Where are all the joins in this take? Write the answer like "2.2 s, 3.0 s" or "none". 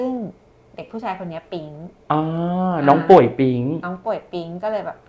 2.0 s